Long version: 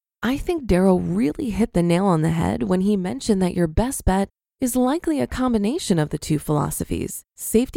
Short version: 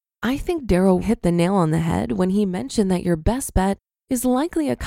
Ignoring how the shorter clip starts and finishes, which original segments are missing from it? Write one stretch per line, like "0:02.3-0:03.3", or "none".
0:01.0-0:01.5